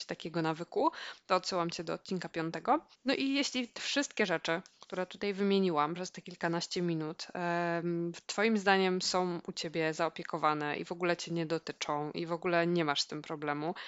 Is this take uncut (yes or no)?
no